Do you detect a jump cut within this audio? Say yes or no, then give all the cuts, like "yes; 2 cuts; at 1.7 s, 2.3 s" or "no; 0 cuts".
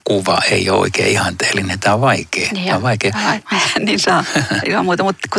yes; 1 cut; at 3.4 s